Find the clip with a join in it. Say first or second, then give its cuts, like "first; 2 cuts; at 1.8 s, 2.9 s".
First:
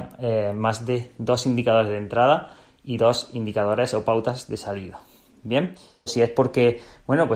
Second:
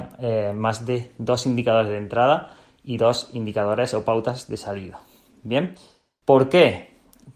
first; 1 cut; at 6.1 s